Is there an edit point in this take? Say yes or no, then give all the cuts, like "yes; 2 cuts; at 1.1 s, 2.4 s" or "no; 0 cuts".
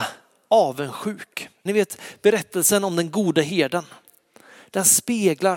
yes; 1 cut; at 1.7 s